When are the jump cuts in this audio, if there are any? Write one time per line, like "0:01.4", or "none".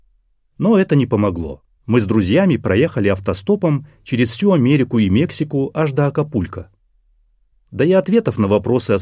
0:01.8
0:07.5